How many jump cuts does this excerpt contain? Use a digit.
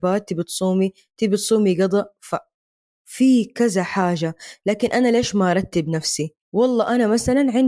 1